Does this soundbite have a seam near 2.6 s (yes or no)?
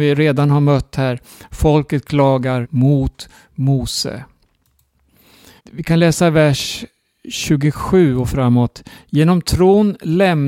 yes